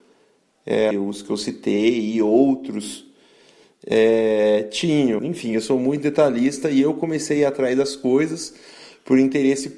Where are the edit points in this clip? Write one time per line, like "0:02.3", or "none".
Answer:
0:00.9
0:05.2